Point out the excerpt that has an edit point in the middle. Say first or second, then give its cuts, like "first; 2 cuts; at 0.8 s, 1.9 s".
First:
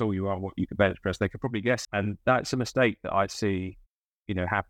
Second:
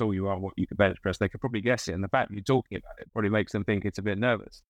first; 1 cut; at 1.8 s